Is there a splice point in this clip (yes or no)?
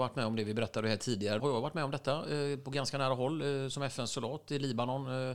yes